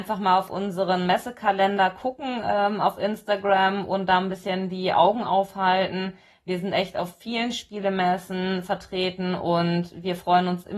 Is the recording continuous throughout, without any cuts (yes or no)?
yes